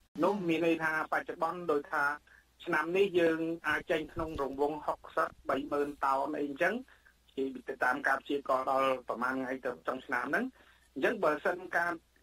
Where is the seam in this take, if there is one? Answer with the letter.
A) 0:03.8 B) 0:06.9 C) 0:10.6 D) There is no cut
A